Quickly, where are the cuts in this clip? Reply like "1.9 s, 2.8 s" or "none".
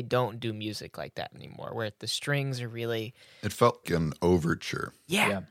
3.8 s